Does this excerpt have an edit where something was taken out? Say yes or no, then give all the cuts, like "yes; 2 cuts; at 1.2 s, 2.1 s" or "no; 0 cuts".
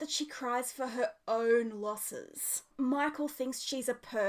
yes; 1 cut; at 2.7 s